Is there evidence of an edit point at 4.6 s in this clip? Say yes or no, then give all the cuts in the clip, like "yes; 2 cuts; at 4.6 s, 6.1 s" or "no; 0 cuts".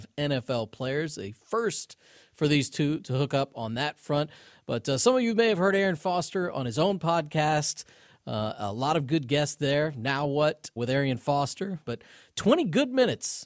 no; 2 cuts; at 10.8 s, 11.8 s